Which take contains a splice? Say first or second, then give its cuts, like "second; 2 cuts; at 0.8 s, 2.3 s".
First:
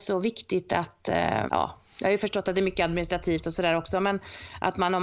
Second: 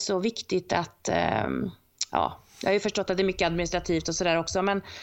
first; 1 cut; at 1.5 s